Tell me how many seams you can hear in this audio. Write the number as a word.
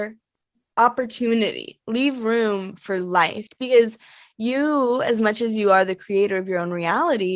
zero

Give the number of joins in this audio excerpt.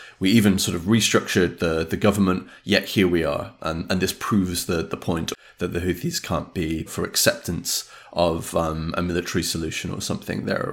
one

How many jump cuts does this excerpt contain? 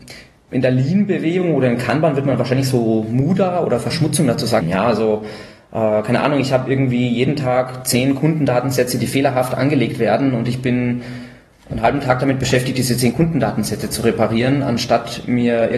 one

